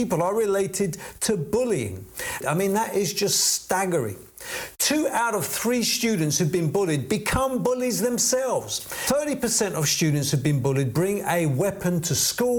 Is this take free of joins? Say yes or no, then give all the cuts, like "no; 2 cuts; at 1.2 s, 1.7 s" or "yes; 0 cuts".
no; 1 cut; at 2.4 s